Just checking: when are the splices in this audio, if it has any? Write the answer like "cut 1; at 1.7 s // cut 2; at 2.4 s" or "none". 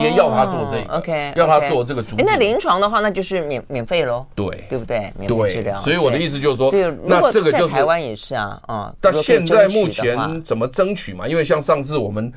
none